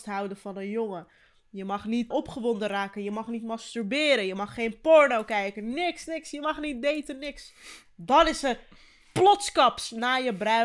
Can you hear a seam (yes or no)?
yes